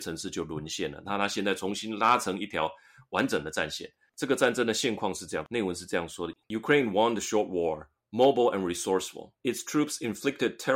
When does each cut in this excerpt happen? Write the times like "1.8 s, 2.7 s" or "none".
9.4 s